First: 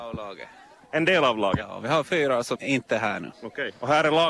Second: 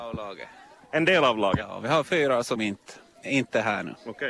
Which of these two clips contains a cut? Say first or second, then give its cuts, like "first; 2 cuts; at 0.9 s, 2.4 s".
first; 1 cut; at 2.6 s